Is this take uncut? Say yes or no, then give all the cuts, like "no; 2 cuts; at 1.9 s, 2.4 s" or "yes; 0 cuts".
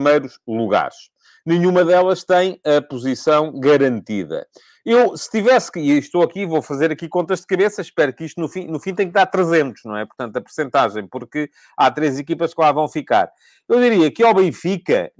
yes; 0 cuts